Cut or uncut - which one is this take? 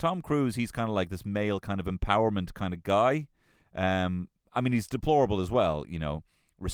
uncut